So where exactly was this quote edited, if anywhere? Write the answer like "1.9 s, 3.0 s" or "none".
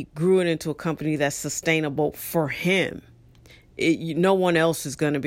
none